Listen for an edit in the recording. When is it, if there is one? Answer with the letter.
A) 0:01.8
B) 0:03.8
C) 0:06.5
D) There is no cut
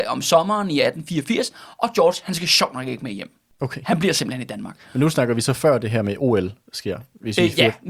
D